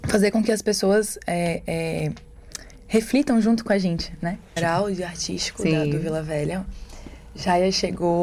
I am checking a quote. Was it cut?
yes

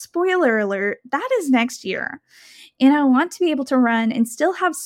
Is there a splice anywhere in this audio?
no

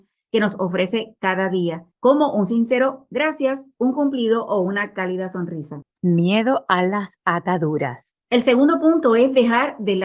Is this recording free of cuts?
no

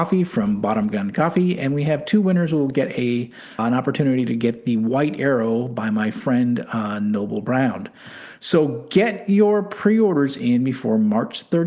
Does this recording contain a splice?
yes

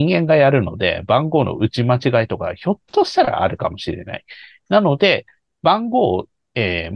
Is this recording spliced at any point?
no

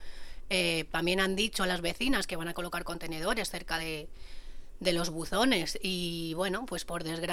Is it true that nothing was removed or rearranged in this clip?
yes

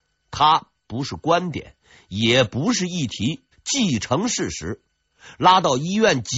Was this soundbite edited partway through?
yes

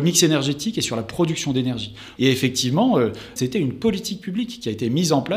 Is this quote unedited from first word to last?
no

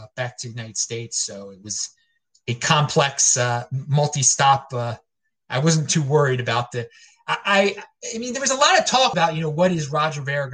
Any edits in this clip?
yes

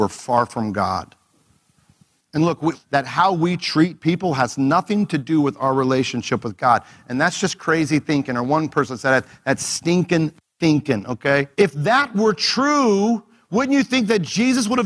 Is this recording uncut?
no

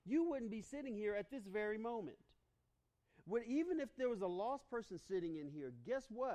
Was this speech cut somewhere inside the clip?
no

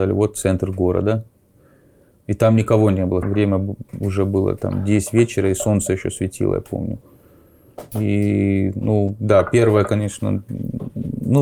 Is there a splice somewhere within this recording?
yes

